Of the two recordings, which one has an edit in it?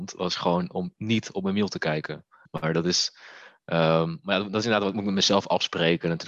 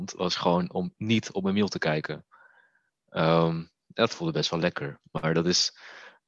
first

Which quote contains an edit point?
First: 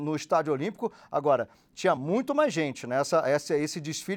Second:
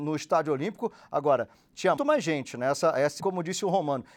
second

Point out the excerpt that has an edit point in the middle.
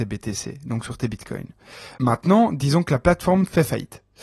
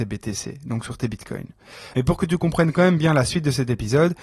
second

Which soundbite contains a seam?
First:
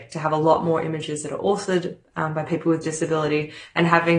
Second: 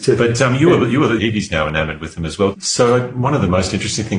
second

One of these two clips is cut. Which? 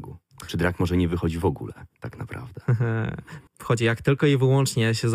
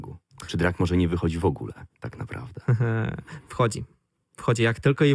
first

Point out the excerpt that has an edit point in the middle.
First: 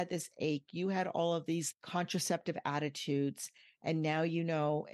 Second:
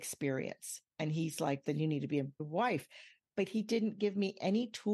second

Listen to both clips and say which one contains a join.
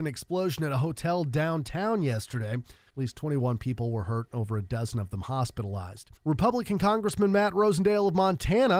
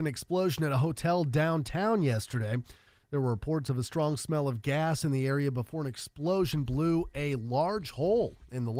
first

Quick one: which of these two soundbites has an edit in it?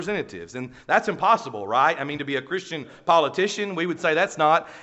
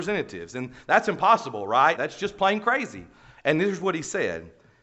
second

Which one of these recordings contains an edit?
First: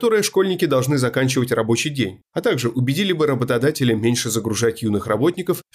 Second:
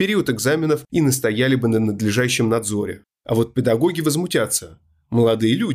second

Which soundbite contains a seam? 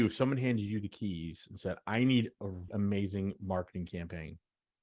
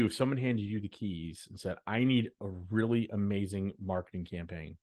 first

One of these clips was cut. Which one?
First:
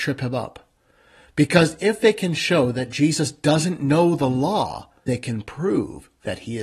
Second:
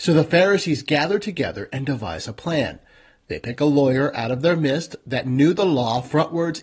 first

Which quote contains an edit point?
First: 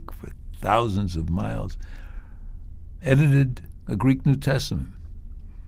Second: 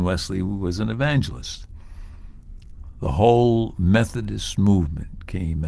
first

